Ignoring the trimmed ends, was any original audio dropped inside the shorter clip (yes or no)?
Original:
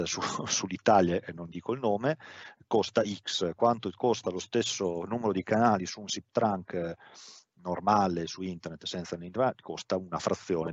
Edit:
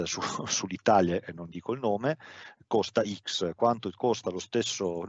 no